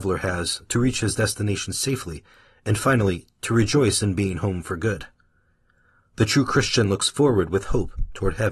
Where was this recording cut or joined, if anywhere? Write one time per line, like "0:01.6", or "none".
none